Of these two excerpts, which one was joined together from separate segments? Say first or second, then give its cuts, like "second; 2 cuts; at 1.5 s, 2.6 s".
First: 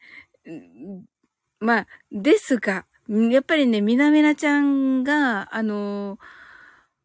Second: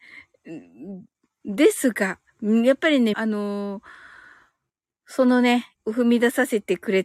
second; 3 cuts; at 1.4 s, 3.1 s, 5.7 s